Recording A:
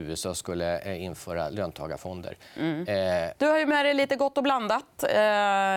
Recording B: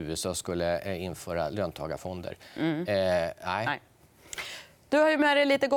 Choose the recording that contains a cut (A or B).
A